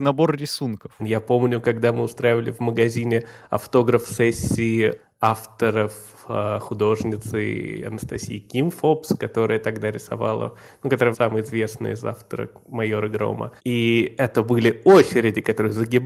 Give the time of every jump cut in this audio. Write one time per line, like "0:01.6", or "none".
0:01.0
0:11.1
0:13.6

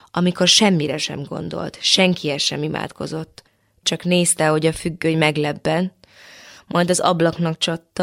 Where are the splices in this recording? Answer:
none

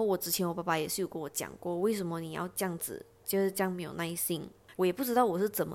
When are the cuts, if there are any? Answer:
0:04.7

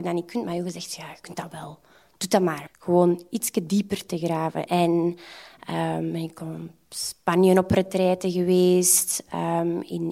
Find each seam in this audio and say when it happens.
0:02.7
0:04.7

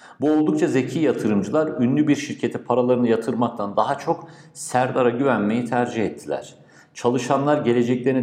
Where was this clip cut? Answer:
none

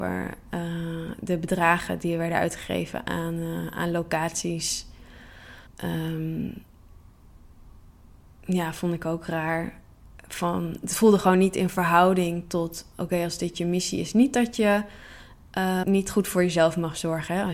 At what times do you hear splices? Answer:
0:05.7
0:15.8

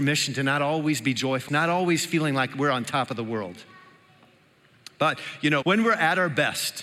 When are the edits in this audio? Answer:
0:01.5
0:05.6

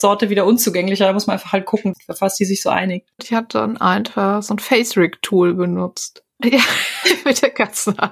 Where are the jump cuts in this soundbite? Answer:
0:01.9
0:03.2
0:06.4

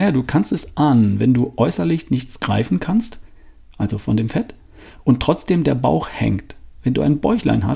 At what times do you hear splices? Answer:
none

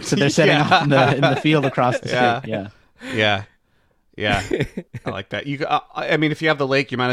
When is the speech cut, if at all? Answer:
none

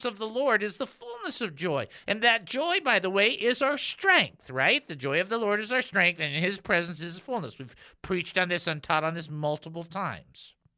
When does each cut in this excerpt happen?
none

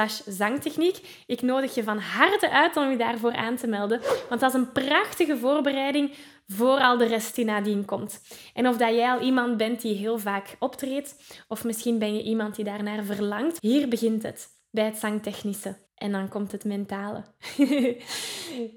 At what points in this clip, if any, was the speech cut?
0:13.6
0:15.9

